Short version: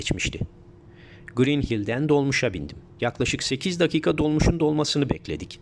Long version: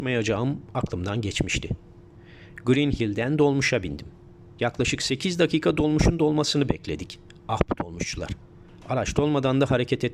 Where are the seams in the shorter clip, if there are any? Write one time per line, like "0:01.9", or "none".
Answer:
0:02.9

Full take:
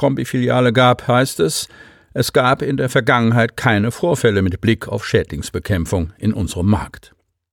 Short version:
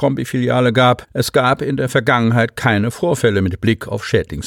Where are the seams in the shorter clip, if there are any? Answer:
0:01.0

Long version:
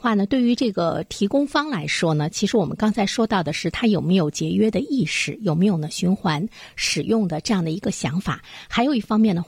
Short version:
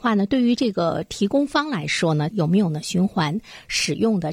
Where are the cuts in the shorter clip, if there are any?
0:02.3

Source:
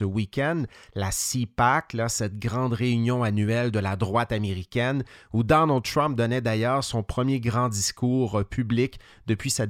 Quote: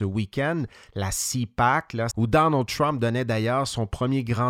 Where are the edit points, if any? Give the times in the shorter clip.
0:02.1

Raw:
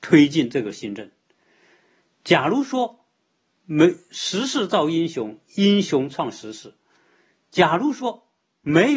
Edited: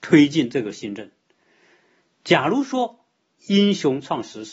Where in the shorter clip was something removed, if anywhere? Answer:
0:03.4

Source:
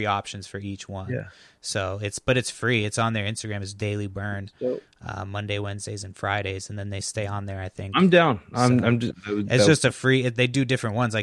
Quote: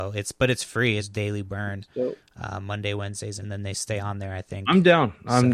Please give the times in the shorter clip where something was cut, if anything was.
0:01.0
0:03.4

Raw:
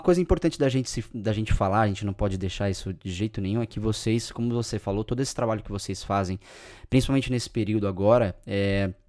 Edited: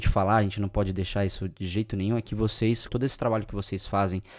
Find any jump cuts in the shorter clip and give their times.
0:02.9

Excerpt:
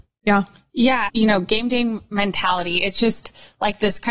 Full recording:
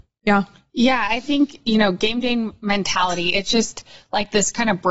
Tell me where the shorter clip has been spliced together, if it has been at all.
0:01.1

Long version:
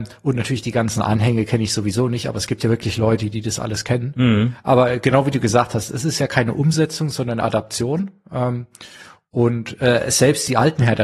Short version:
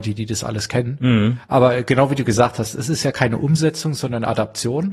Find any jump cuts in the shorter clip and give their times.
none

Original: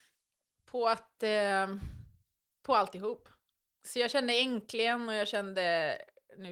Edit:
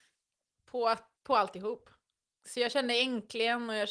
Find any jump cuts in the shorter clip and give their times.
0:01.2

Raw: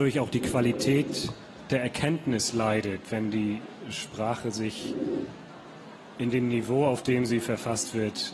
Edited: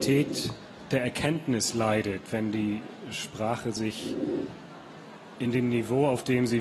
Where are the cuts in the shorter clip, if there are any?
none

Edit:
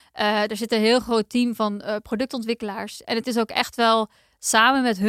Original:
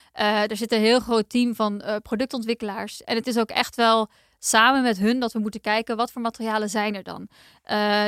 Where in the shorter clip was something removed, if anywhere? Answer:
none

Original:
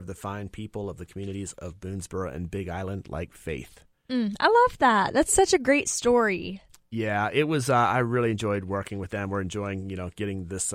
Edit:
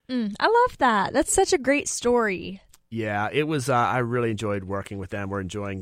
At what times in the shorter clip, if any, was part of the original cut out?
none

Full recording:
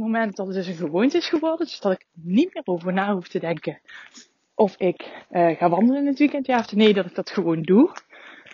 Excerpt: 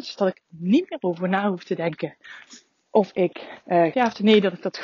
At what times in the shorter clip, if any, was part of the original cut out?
0:03.9

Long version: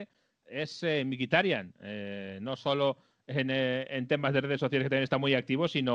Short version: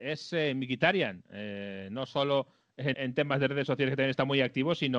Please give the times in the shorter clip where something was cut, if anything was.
0:02.9

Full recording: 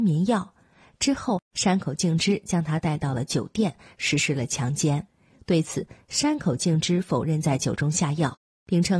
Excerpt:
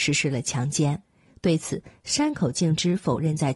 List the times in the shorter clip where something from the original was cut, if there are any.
none

